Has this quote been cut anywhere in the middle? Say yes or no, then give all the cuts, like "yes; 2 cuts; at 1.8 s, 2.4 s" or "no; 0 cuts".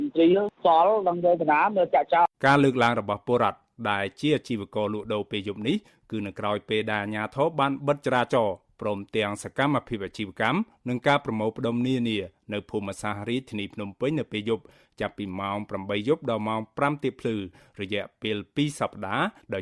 yes; 1 cut; at 2.3 s